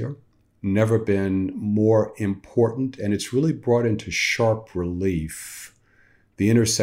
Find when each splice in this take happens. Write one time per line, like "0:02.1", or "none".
none